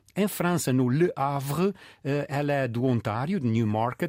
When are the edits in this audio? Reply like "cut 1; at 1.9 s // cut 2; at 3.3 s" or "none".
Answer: none